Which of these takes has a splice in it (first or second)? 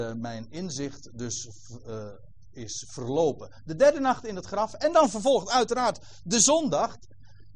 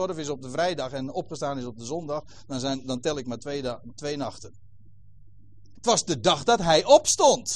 second